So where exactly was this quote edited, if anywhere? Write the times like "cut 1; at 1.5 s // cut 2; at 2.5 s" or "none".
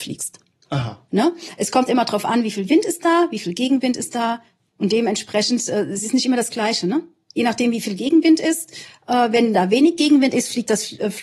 none